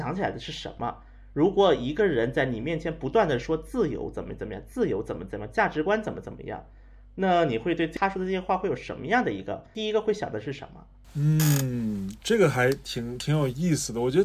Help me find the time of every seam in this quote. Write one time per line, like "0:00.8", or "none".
none